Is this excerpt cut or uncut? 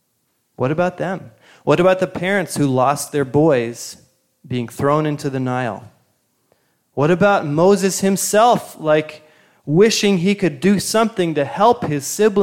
uncut